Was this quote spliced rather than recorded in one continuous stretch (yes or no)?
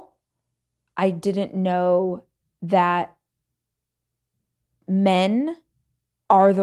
no